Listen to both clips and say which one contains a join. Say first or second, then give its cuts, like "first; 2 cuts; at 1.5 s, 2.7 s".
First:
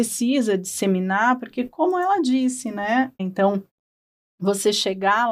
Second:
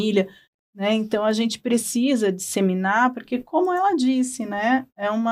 first; 1 cut; at 3.2 s